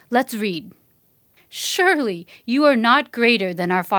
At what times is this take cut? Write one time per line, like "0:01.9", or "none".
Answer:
0:01.4